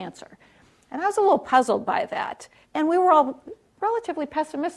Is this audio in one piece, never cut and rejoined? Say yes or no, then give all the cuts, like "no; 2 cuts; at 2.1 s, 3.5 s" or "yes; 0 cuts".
no; 1 cut; at 2.6 s